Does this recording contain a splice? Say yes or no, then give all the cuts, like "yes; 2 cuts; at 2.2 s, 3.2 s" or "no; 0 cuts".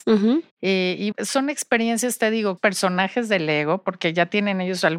yes; 2 cuts; at 1.1 s, 2.6 s